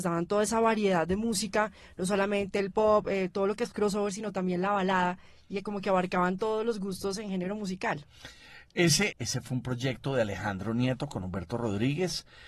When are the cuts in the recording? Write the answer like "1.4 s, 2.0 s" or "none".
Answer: 9.1 s